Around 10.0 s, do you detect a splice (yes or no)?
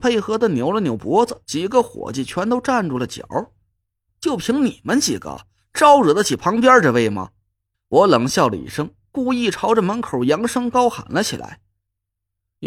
no